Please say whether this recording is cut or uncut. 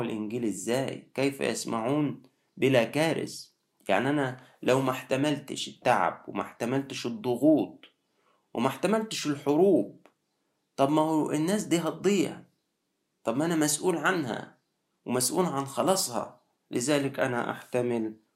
uncut